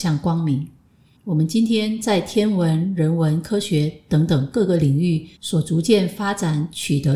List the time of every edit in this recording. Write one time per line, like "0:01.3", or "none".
0:01.2
0:05.4